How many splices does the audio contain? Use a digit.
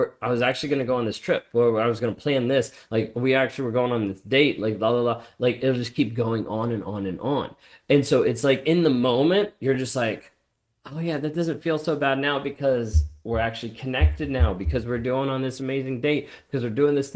0